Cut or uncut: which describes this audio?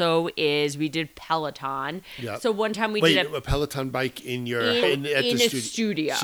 cut